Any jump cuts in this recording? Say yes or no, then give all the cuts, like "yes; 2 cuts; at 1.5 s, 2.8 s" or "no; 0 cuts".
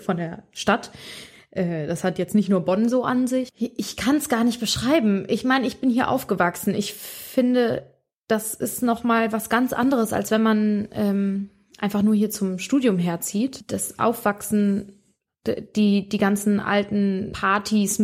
no; 0 cuts